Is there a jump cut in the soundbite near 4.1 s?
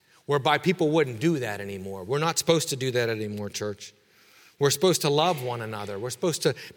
no; 0 cuts

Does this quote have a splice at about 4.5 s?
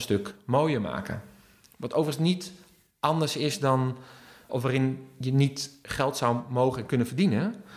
yes; 1 cut; at 4.5 s

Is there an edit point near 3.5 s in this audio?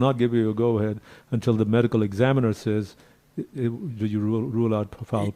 yes; 1 cut; at 3.5 s

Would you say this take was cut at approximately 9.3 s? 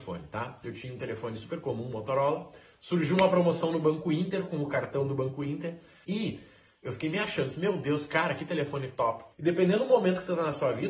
yes; 2 cuts; at 6.0 s, 9.3 s

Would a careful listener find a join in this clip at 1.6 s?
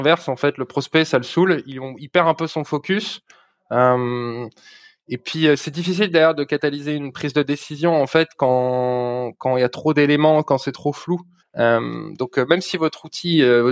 no; 1 cut; at 11.4 s

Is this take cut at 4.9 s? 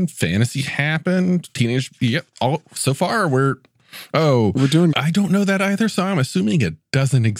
yes; 1 cut; at 4.9 s

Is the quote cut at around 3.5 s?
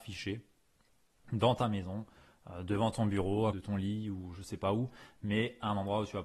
yes; 1 cut; at 3.5 s

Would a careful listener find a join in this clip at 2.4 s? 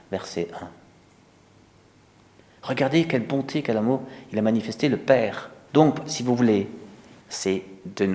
no; 2 cuts; at 5.7 s, 7.2 s

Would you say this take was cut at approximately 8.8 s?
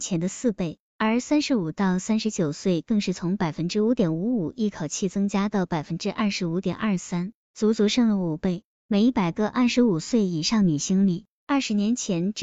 no; 0 cuts

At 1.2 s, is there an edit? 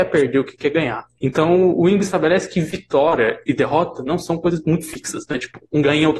yes; 1 cut; at 1.2 s

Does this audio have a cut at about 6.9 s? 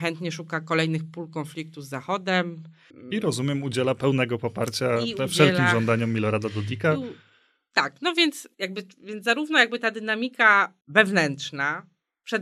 no; 1 cut; at 8.5 s

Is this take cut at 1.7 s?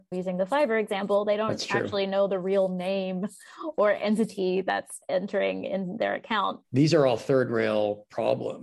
no; 1 cut; at 6.6 s

